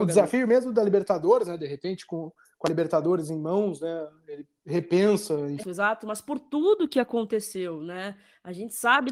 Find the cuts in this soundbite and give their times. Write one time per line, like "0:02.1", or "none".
0:05.6